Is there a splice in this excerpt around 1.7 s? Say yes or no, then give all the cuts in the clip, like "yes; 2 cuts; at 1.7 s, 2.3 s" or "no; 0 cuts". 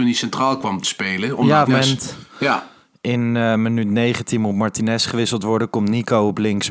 yes; 1 cut; at 1.7 s